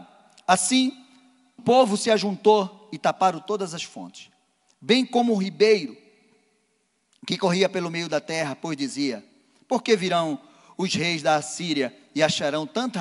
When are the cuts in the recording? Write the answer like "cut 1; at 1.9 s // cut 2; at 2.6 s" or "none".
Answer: cut 1; at 1.6 s